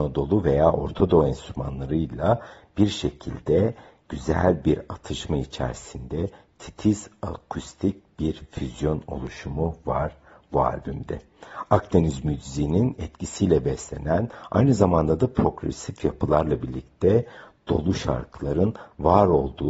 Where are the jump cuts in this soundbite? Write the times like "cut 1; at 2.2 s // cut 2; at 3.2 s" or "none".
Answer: none